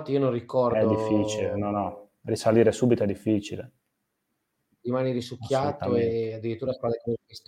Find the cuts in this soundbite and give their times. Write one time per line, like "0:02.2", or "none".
none